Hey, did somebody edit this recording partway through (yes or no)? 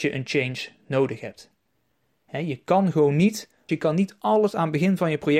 yes